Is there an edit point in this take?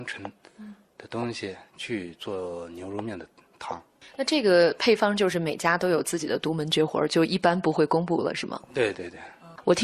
yes; 1 cut; at 8.9 s

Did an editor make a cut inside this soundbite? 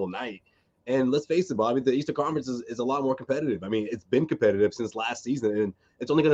no; 0 cuts

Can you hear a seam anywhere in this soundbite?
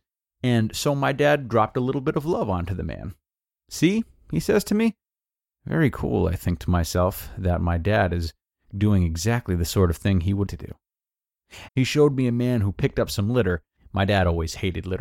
yes; 2 cuts; at 10.5 s, 11.7 s

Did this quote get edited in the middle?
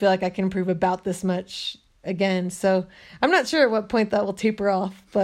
no; 0 cuts

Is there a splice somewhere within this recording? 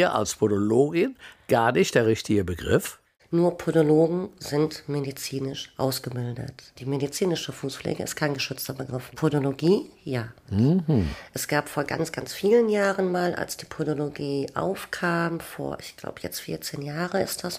no; 0 cuts

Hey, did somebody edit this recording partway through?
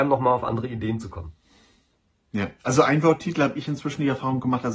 yes; 1 cut; at 2.6 s

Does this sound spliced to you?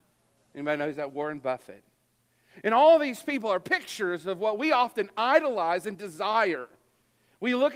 no; 0 cuts

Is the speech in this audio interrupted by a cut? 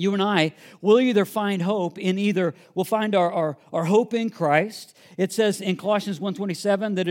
no; 0 cuts

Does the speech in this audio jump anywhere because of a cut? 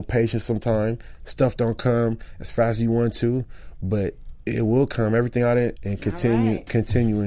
yes; 1 cut; at 5.8 s

